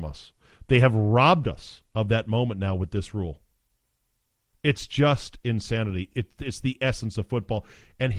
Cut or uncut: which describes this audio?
uncut